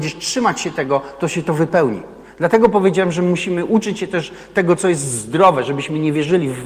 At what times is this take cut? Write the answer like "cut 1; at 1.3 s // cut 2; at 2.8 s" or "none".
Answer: none